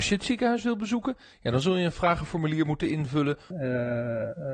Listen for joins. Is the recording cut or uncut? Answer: cut